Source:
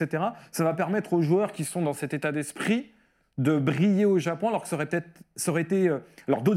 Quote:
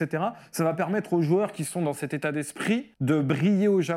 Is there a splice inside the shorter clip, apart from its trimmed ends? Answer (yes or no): yes